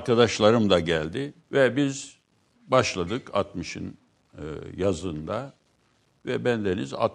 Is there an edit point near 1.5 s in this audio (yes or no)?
yes